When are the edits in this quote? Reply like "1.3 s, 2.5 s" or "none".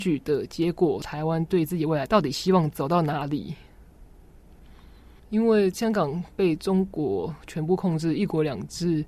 1.0 s